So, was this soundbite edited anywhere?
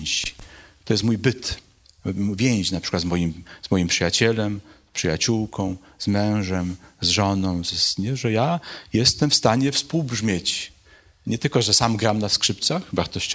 no; 0 cuts

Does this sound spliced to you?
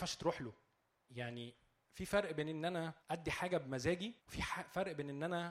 yes; 3 cuts; at 1.1 s, 3.0 s, 4.2 s

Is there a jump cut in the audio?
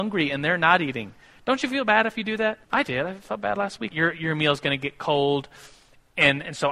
yes; 2 cuts; at 2.6 s, 3.9 s

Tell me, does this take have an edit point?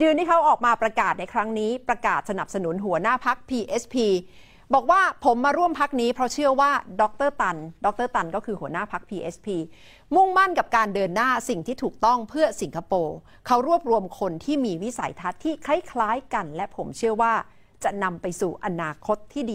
no; 0 cuts

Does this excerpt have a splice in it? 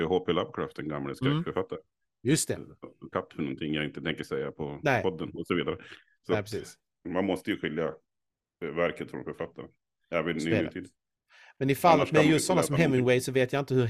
yes; 2 cuts; at 3.1 s, 7.0 s

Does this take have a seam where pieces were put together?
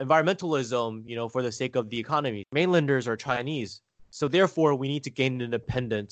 yes; 2 cuts; at 2.4 s, 4.0 s

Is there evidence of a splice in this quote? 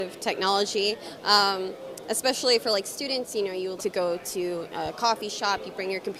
yes; 1 cut; at 3.8 s

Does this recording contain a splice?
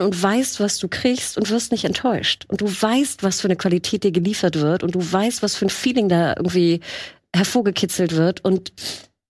no; 0 cuts

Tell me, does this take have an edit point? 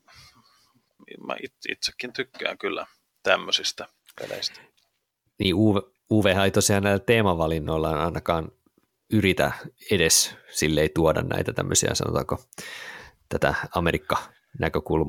no; 0 cuts

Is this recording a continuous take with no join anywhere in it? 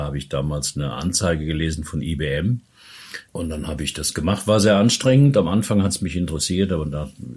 no; 1 cut; at 3.3 s

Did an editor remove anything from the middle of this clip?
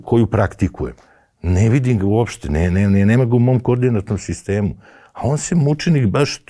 no; 0 cuts

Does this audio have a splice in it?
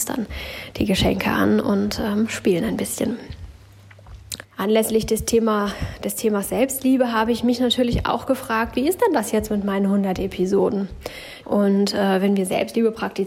yes; 2 cuts; at 4.4 s, 11.4 s

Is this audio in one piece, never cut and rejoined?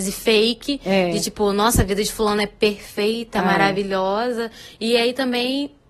yes; 0 cuts

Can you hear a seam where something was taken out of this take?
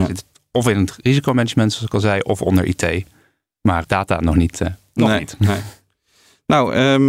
yes; 1 cut; at 3.8 s

